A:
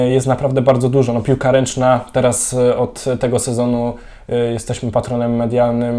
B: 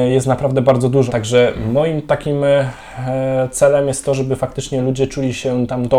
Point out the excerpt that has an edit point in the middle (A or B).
B